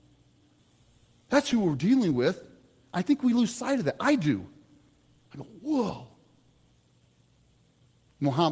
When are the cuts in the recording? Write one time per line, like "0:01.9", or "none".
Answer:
none